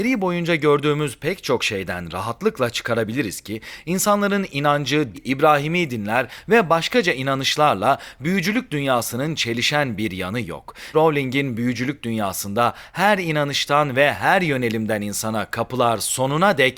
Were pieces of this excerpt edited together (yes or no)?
yes